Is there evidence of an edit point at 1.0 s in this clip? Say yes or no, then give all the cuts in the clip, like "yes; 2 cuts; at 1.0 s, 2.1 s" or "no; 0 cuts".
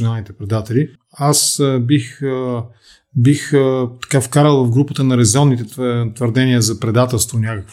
yes; 1 cut; at 1.0 s